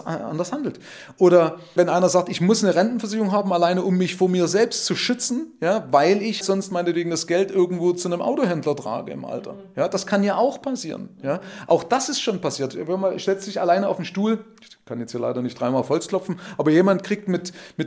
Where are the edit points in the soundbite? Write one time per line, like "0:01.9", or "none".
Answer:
0:06.4

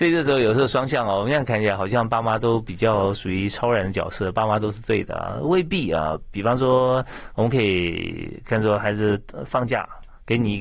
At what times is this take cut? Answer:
none

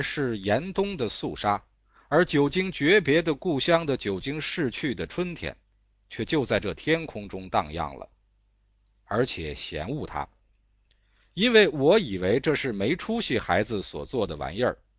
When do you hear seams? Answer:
0:09.0

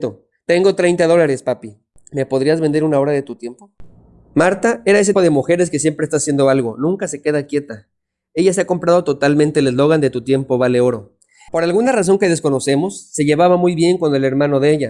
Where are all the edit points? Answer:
0:05.1
0:11.5

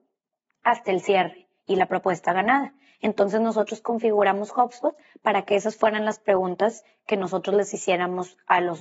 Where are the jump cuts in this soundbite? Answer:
0:02.9

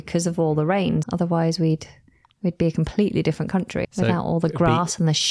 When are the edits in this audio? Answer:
0:01.0
0:03.8

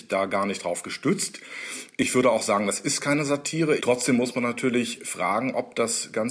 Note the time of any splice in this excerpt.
0:03.8

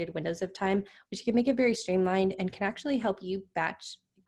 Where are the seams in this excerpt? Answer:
none

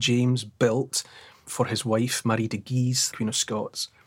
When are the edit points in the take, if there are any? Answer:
0:01.4
0:03.1

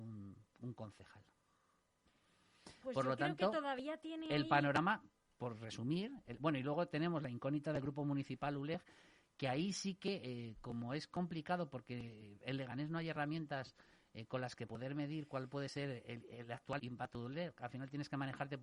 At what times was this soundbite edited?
0:16.8

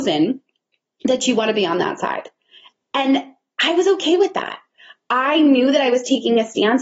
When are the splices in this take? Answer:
none

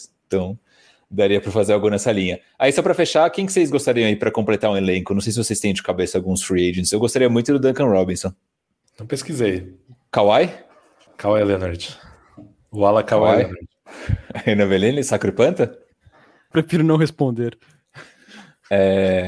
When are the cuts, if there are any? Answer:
none

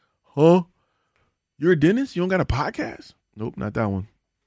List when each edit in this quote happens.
0:03.2

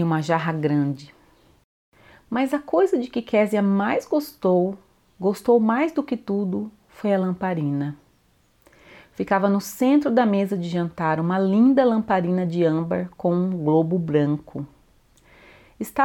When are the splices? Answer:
none

